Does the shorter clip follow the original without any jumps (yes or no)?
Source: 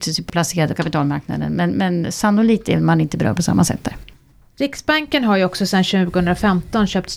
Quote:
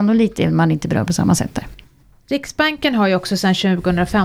yes